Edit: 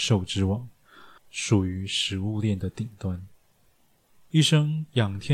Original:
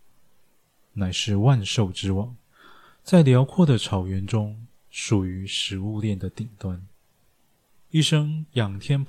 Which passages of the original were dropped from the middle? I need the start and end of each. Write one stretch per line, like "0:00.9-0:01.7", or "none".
0:02.9-0:04.8